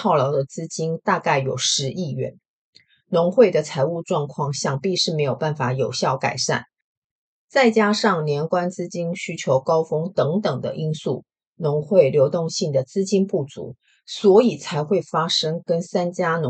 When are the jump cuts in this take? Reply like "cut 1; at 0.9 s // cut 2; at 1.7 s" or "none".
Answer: none